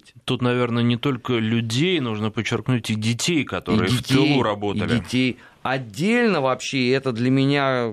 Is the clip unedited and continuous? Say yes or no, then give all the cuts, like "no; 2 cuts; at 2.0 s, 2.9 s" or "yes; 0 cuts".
yes; 0 cuts